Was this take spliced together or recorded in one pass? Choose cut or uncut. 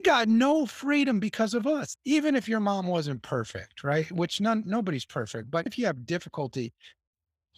cut